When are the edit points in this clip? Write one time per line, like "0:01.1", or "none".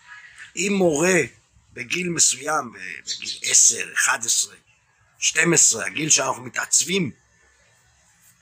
none